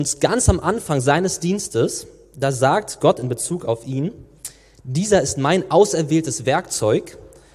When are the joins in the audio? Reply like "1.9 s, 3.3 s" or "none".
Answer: none